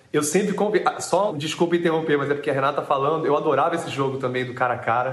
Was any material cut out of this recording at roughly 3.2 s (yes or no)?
no